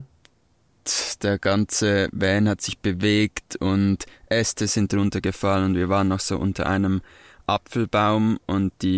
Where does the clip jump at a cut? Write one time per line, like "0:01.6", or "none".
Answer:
none